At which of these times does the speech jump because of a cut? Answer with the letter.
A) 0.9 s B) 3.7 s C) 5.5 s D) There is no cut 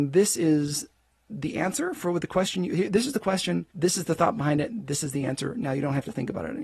B